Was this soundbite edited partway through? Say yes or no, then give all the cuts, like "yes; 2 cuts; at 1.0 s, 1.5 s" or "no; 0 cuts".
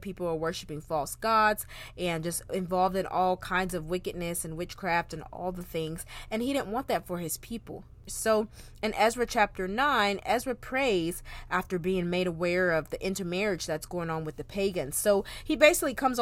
yes; 1 cut; at 8.1 s